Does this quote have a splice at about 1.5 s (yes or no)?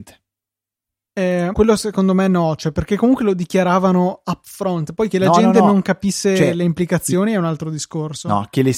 yes